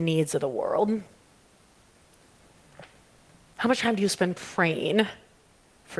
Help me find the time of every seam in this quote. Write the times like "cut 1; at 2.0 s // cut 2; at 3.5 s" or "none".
none